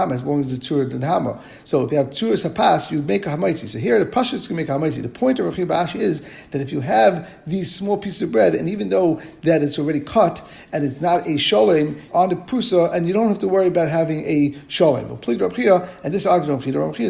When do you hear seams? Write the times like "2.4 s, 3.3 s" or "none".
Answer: 12.1 s